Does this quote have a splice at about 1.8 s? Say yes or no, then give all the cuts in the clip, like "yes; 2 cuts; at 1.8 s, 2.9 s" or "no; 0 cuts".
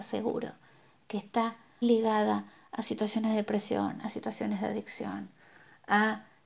yes; 1 cut; at 1.8 s